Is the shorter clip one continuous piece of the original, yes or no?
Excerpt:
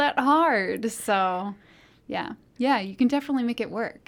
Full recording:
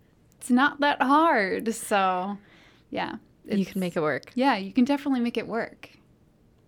no